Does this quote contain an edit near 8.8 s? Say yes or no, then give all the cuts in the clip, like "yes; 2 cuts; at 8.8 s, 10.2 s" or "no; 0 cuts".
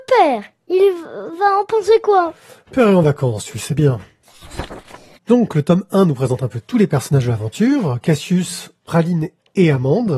no; 0 cuts